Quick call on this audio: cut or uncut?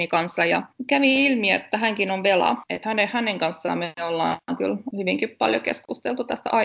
uncut